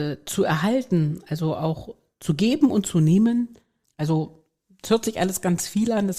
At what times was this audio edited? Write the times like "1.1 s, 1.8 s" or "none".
3.8 s